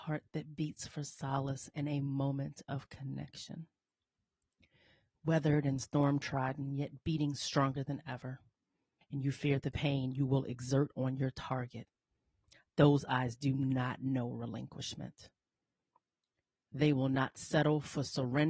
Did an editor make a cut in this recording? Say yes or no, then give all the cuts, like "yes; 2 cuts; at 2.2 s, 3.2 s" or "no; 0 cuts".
yes; 1 cut; at 9.0 s